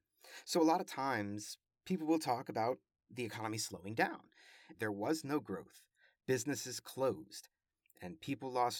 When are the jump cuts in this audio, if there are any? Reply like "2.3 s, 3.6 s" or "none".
4.7 s